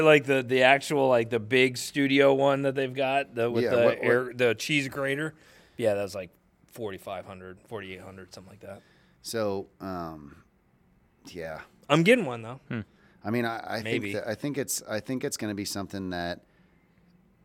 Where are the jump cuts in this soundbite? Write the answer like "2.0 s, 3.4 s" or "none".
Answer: none